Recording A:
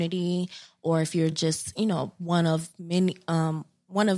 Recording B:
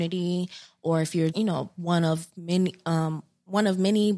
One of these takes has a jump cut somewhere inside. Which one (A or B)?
B